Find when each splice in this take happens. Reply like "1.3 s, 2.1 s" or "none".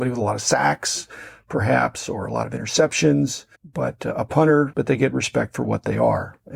3.5 s, 4.7 s